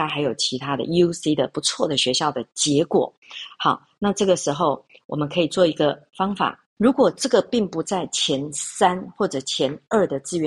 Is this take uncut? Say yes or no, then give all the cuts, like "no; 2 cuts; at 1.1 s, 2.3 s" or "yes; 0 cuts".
no; 1 cut; at 6.8 s